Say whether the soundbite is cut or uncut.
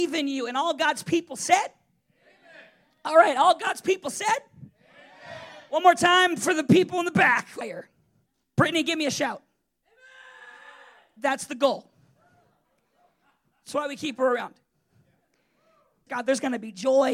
cut